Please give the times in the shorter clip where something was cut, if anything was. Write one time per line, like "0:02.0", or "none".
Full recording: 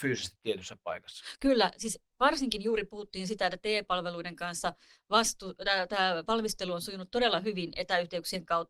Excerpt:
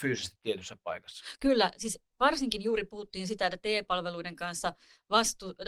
none